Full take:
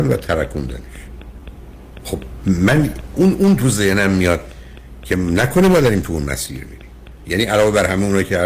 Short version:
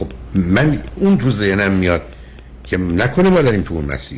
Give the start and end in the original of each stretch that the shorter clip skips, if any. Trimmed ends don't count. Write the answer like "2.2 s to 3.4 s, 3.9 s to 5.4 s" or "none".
3.1 s to 3.3 s